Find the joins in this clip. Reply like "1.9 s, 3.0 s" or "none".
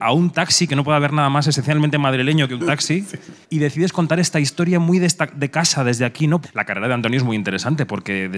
3.4 s, 6.4 s